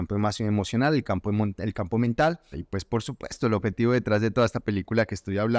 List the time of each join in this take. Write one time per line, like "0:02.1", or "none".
0:02.5